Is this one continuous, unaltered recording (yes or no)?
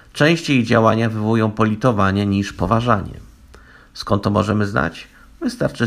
yes